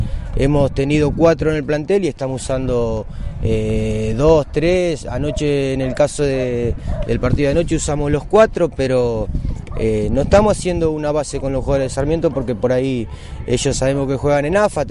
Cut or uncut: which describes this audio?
uncut